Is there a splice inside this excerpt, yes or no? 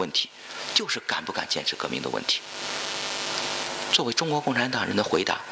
no